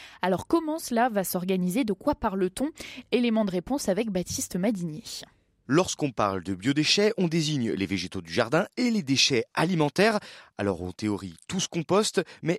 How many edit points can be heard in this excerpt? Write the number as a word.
zero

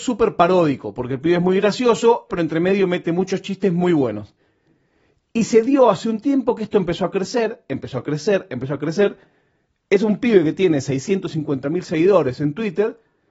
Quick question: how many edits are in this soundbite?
one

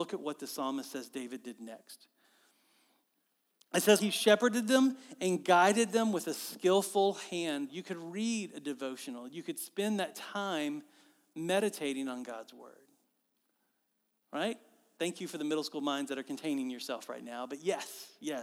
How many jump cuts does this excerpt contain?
two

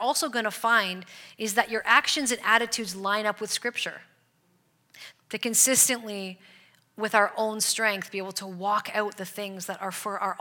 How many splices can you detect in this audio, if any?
one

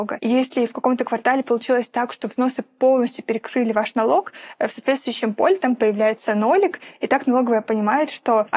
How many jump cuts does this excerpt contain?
zero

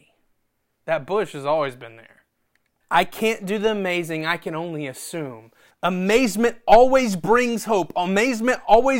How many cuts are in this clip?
two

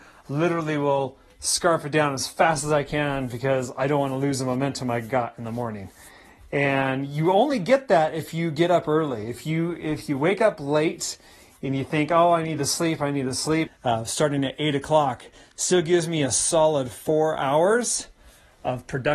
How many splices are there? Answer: one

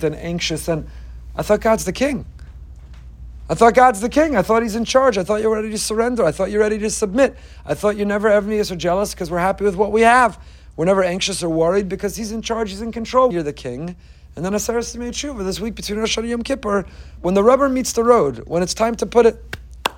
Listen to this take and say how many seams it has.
two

